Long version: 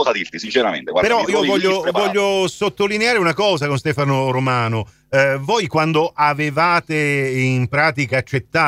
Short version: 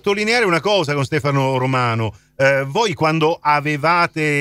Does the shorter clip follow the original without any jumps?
yes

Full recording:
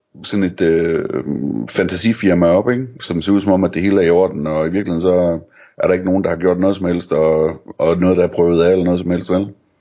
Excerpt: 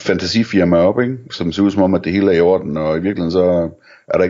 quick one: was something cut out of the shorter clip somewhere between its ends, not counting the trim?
no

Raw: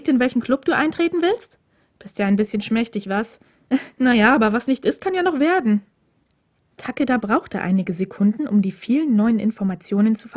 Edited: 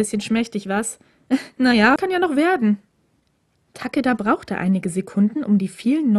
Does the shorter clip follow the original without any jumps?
no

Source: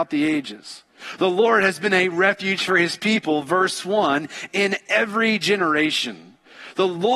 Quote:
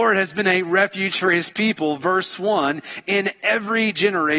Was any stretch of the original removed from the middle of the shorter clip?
no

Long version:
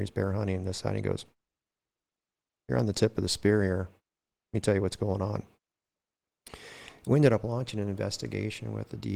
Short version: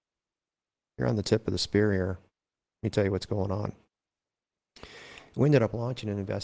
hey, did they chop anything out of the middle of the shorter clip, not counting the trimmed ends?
no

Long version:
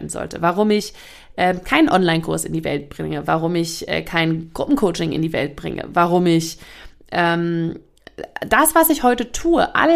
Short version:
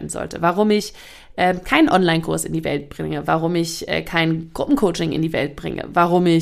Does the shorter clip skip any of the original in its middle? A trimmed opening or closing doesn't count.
no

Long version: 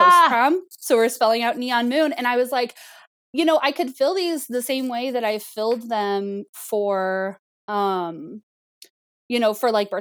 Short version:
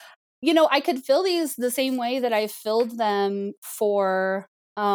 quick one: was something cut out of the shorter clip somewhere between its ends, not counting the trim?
no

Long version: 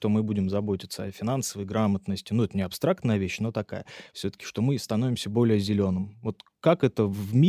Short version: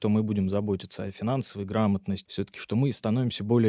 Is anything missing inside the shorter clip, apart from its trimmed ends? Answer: yes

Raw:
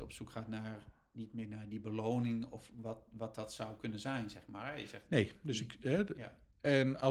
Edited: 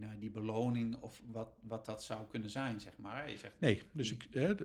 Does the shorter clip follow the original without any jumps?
yes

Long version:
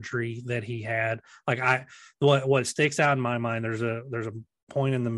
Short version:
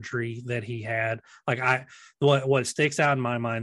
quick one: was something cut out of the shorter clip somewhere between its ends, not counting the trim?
no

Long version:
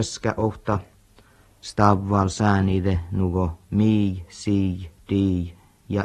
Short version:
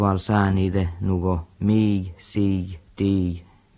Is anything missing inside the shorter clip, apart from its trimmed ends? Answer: no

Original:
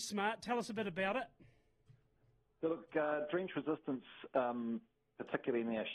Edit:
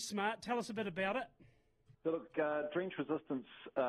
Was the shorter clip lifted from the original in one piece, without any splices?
no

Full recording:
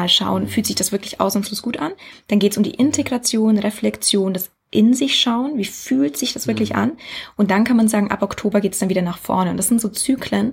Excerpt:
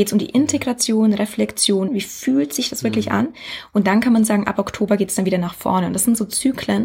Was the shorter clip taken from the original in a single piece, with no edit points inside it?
no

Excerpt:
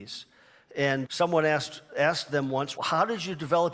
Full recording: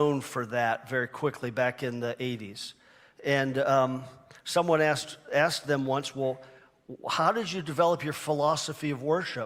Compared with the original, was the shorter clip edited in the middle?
yes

